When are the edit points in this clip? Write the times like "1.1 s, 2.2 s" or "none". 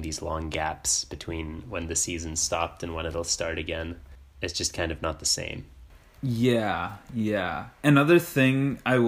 none